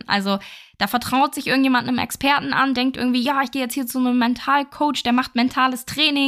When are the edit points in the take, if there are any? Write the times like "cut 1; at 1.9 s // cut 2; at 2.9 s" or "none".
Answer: none